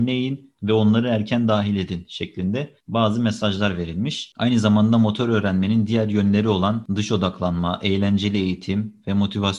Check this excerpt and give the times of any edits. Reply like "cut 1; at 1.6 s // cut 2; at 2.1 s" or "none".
cut 1; at 4.3 s